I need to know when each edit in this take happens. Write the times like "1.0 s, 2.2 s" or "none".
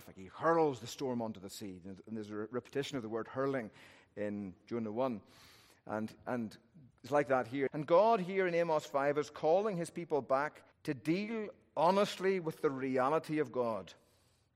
7.7 s, 10.7 s